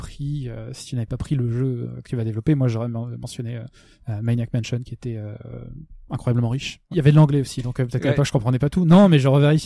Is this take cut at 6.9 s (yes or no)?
yes